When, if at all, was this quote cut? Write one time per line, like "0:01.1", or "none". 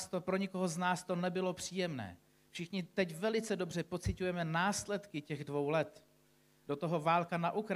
none